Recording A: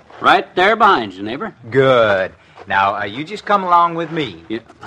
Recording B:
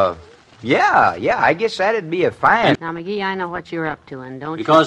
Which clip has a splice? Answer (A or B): B